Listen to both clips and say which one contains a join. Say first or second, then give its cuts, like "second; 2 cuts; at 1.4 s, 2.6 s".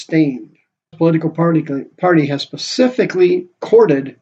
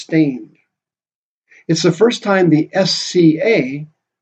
first; 1 cut; at 0.9 s